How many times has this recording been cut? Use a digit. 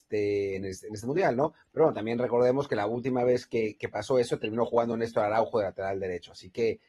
1